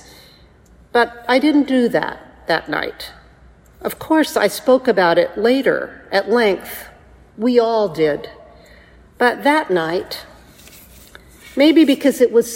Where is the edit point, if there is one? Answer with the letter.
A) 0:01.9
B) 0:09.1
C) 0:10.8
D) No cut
D